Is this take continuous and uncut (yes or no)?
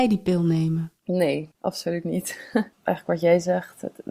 no